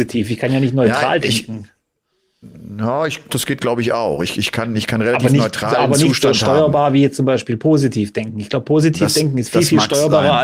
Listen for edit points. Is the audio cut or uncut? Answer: cut